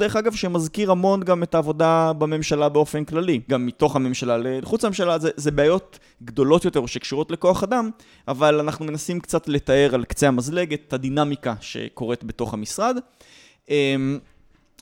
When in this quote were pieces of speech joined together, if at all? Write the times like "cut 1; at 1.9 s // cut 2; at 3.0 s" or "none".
cut 1; at 3.5 s